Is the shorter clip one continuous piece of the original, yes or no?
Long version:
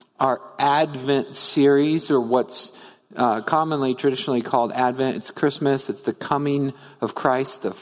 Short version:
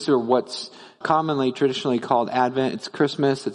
no